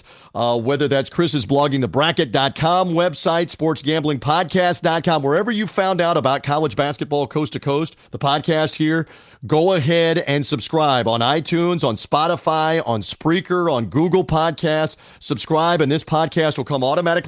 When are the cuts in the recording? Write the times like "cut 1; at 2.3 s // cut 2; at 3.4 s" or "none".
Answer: cut 1; at 8.0 s